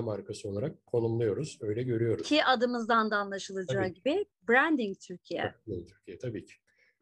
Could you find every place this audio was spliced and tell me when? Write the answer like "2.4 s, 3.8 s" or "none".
none